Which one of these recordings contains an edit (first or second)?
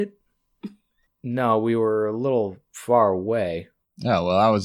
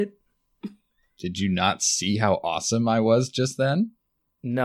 first